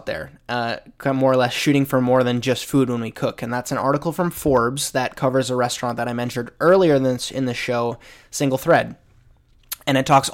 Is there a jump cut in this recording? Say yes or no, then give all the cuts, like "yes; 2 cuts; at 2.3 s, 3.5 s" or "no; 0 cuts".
no; 0 cuts